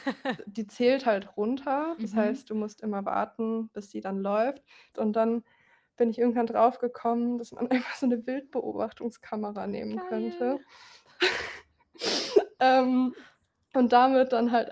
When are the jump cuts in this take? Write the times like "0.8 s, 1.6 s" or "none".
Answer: 4.9 s